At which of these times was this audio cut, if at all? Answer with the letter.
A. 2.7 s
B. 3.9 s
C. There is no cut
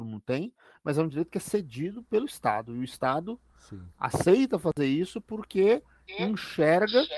C